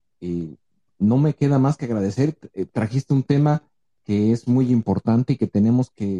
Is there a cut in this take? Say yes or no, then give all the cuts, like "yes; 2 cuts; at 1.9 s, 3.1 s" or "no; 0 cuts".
no; 0 cuts